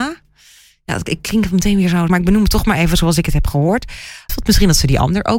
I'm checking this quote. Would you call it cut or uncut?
cut